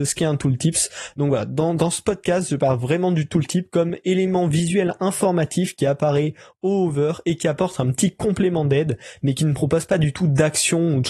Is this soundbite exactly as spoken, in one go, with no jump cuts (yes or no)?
yes